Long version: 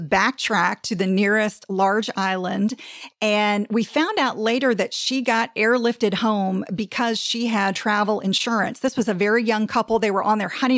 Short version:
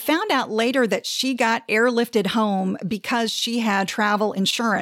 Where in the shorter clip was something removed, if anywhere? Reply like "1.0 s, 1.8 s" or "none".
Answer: none